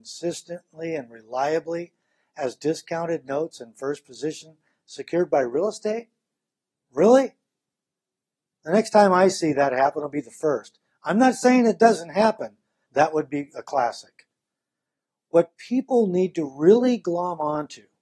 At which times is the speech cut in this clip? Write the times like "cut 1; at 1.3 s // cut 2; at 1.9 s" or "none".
cut 1; at 12.9 s